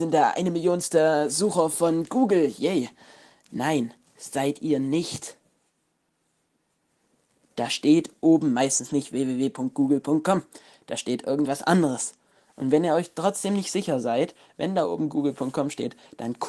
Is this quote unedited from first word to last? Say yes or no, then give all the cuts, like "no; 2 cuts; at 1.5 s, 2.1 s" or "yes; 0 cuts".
yes; 0 cuts